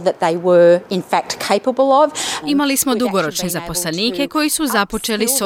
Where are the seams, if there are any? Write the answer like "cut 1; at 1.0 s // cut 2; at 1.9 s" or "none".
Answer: cut 1; at 2.4 s